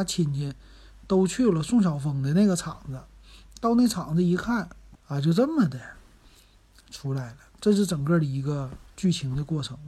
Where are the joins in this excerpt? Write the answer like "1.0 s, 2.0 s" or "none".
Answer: 5.0 s